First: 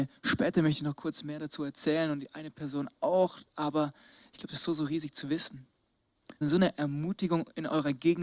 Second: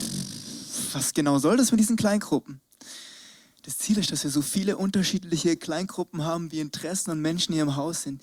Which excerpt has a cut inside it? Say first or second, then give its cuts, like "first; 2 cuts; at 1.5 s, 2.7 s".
first; 1 cut; at 6.4 s